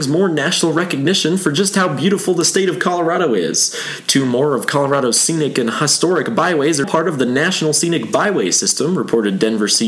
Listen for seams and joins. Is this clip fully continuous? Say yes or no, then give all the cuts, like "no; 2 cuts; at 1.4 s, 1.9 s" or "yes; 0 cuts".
no; 1 cut; at 6.8 s